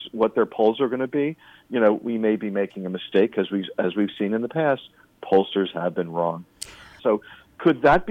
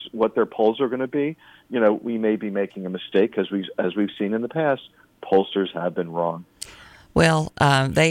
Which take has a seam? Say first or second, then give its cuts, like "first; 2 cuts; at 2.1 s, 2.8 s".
first; 1 cut; at 7.0 s